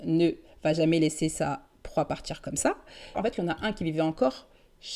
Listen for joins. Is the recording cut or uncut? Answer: cut